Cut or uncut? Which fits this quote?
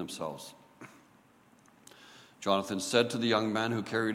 cut